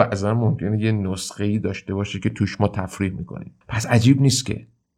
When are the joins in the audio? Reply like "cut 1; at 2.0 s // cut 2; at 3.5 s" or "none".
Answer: cut 1; at 3.6 s